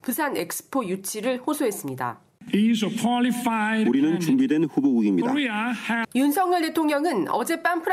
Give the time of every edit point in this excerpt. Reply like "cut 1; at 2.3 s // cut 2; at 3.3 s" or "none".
cut 1; at 6.0 s